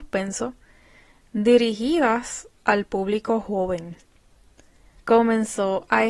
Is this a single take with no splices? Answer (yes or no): no